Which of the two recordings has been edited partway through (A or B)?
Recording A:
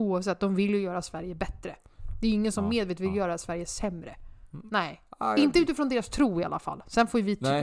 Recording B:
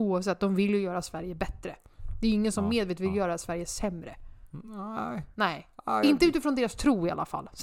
A